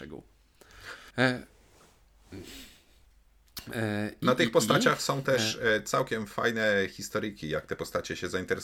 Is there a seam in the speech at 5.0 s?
no; 1 cut; at 1.1 s

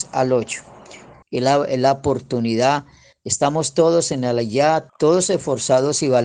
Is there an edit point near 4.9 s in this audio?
yes; 2 cuts; at 1.2 s, 4.9 s

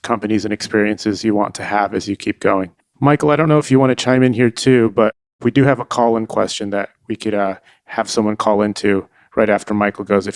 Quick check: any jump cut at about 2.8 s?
yes; 1 cut; at 2.8 s

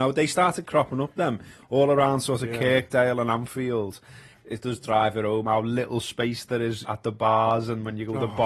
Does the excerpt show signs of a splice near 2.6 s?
no; 2 cuts; at 4.3 s, 6.8 s

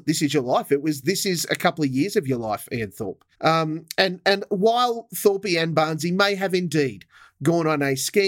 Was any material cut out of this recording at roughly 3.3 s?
yes; 1 cut; at 3.3 s

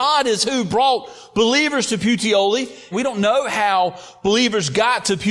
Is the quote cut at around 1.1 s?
no; 1 cut; at 2.9 s

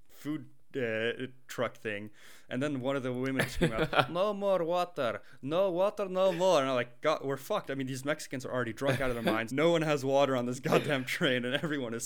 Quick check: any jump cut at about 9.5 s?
yes; 1 cut; at 9.5 s

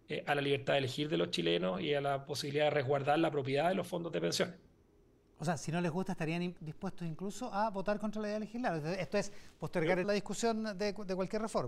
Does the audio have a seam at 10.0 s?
yes; 2 cuts; at 6.6 s, 10.0 s

